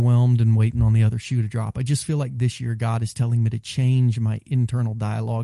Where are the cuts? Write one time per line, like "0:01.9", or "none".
none